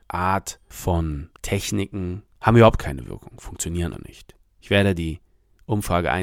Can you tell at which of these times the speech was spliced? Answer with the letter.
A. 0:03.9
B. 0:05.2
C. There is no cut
A